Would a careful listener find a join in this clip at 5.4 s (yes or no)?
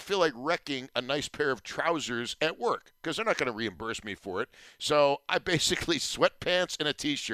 no